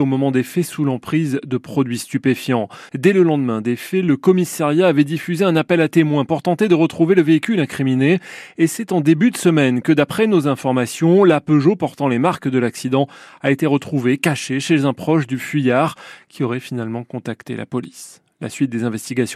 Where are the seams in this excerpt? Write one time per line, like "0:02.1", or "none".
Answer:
0:02.9